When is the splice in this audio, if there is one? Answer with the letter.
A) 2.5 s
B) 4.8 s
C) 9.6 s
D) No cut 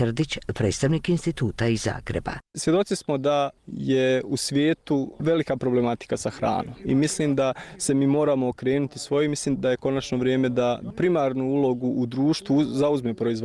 C